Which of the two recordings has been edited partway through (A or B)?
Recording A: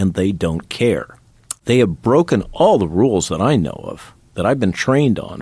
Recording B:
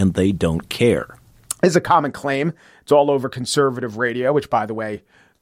A